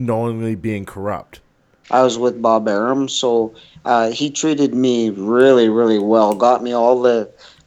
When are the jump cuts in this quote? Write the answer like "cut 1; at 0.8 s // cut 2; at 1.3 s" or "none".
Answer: cut 1; at 1.8 s